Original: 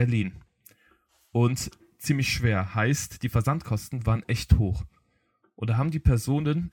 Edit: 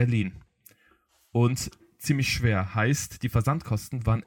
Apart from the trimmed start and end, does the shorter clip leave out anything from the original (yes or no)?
no